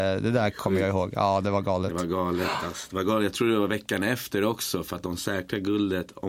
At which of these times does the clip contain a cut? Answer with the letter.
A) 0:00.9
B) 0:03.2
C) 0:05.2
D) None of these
D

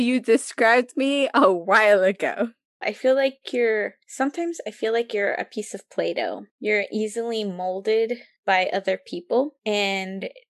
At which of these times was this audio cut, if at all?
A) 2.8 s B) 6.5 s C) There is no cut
A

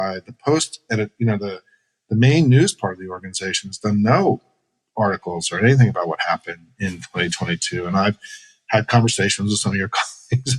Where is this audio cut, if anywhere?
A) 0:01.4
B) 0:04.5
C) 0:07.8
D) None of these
D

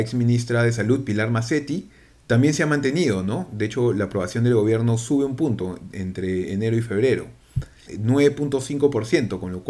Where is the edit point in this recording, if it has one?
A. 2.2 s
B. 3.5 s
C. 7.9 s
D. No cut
C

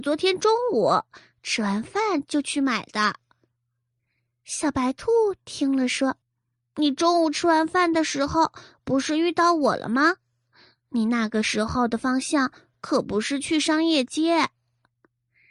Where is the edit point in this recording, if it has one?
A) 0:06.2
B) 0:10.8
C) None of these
A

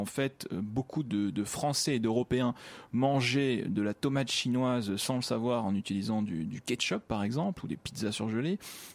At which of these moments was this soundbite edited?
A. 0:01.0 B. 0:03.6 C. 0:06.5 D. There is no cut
D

